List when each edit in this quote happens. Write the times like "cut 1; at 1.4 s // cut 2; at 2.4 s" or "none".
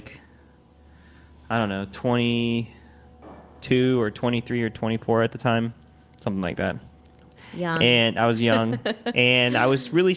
none